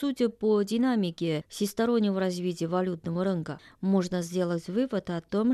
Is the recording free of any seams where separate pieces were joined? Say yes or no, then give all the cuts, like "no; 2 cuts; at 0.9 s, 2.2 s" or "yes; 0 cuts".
yes; 0 cuts